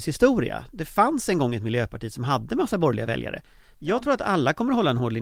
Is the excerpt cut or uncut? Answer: cut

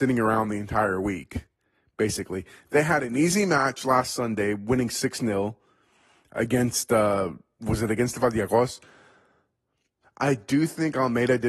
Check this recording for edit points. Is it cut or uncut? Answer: cut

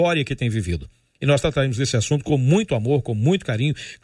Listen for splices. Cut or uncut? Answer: uncut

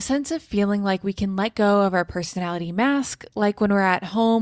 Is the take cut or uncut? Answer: uncut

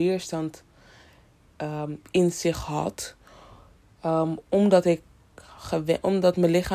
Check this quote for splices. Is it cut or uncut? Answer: uncut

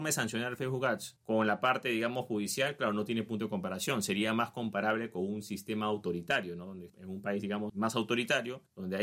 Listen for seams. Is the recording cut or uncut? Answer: uncut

